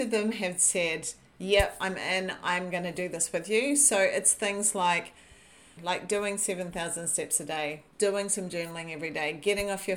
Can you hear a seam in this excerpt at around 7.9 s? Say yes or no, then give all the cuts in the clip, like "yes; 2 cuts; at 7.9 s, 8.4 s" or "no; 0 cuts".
yes; 2 cuts; at 5.8 s, 7.9 s